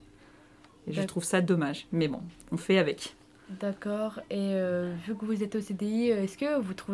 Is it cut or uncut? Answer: uncut